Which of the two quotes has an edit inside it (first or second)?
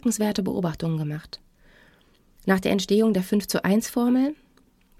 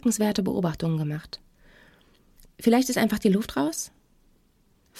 second